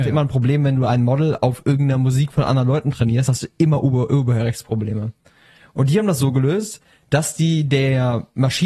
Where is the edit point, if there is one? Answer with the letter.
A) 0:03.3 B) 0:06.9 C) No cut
C